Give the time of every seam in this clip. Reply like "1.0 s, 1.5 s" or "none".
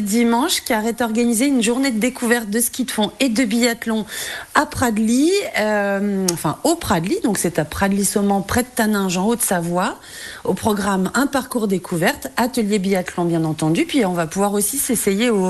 none